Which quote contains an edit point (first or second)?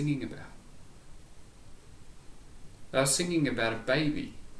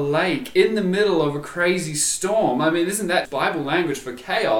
second